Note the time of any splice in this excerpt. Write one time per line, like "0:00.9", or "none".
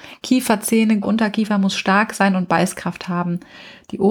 0:01.0